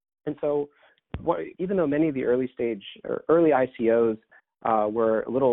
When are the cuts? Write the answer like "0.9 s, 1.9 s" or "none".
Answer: 1.5 s